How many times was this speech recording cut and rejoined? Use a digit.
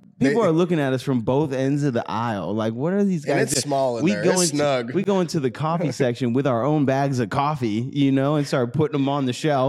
0